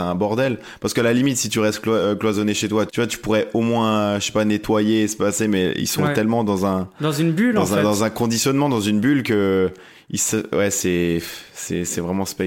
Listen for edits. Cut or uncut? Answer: cut